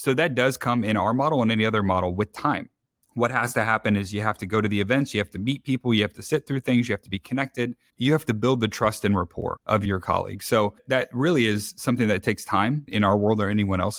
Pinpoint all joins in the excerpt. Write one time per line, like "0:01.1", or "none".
none